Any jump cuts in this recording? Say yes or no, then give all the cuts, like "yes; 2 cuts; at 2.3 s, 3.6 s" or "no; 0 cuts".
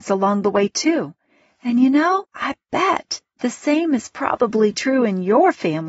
no; 0 cuts